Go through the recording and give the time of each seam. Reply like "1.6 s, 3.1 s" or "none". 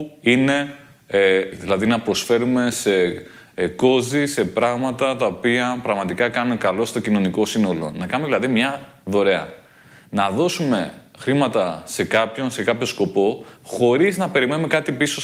1.5 s